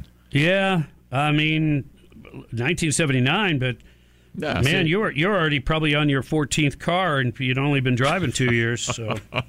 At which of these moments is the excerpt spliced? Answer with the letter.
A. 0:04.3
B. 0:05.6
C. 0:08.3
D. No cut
C